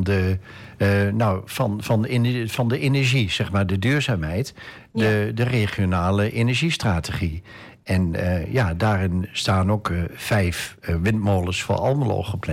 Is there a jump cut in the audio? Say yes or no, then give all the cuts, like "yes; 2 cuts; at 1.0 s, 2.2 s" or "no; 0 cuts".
no; 0 cuts